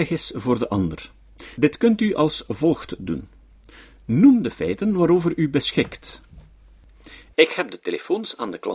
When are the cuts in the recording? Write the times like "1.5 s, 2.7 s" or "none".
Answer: none